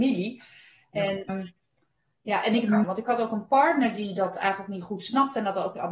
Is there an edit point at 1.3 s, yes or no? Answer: yes